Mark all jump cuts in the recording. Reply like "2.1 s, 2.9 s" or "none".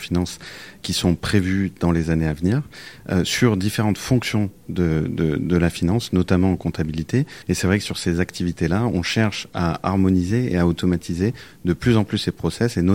7.4 s